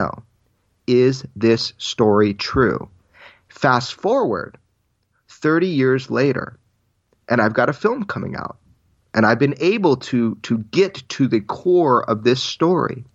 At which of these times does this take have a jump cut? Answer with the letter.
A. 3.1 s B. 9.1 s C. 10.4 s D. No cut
D